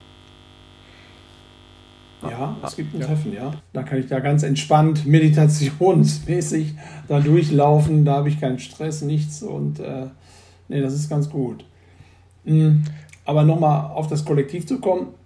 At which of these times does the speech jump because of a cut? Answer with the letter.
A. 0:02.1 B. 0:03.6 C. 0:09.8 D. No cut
B